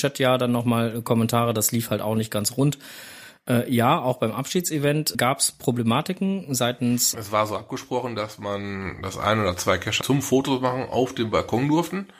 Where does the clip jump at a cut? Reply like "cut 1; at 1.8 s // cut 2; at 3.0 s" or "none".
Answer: cut 1; at 5.1 s // cut 2; at 7.1 s // cut 3; at 10.0 s